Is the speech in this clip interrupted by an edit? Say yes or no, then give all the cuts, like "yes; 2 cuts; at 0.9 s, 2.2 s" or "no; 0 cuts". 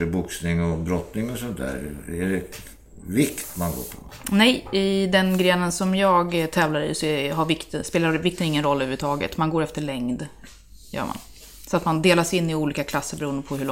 no; 0 cuts